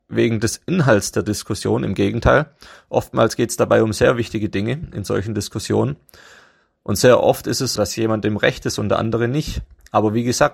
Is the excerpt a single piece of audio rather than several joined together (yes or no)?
no